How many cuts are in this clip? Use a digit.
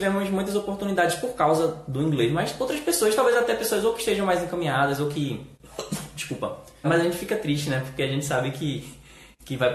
1